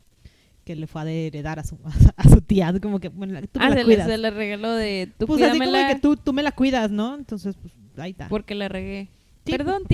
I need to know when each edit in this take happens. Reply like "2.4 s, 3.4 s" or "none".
none